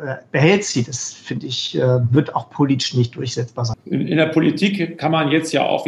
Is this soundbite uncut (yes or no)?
no